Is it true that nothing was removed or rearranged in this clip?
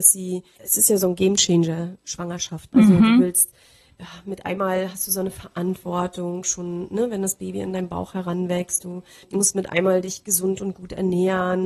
yes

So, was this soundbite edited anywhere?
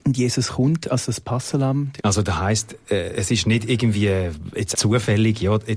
yes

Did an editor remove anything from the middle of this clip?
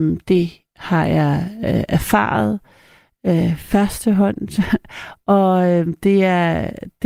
no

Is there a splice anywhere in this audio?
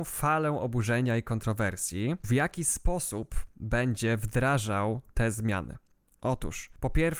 yes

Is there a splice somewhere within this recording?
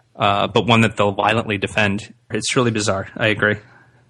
yes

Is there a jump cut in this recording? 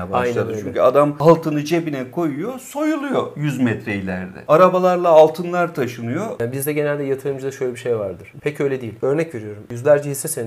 yes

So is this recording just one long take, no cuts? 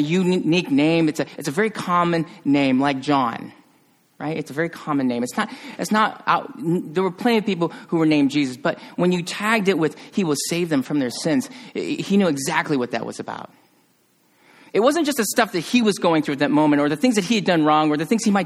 yes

